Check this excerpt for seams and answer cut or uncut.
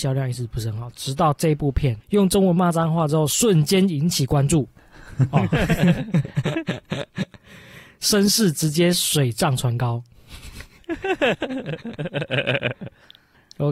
uncut